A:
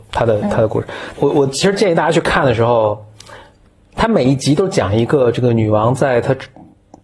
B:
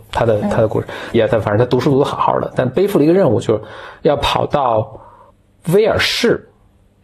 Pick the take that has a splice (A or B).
B